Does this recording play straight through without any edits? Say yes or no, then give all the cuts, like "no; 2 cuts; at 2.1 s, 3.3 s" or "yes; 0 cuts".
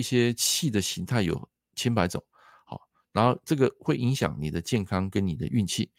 yes; 0 cuts